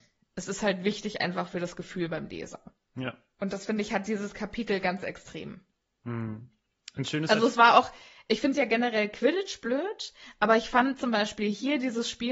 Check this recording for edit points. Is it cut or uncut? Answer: uncut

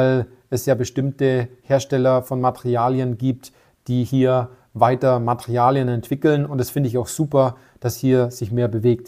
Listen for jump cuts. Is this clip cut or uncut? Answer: uncut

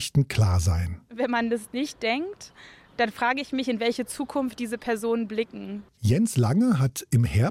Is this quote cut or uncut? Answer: cut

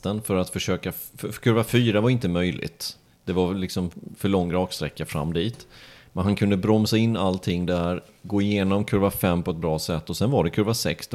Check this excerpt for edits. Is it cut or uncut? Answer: uncut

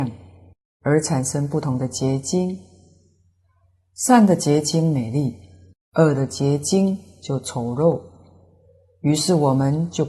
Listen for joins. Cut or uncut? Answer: uncut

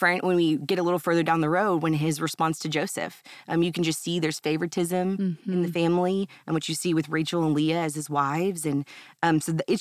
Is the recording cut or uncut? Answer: uncut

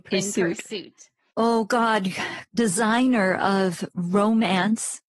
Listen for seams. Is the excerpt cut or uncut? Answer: cut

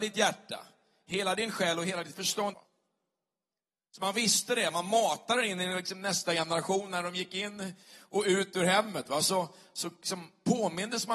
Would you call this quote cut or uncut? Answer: cut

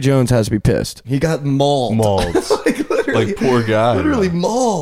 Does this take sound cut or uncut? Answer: cut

